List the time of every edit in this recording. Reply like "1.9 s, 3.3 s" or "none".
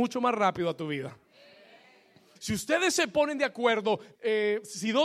2.4 s, 4.1 s